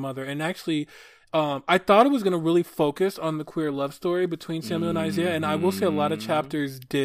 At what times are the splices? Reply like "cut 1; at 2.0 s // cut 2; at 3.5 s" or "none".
none